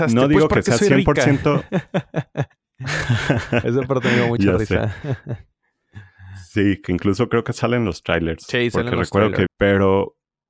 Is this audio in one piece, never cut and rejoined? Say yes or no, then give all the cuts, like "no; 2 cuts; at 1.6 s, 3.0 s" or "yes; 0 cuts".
no; 1 cut; at 9.5 s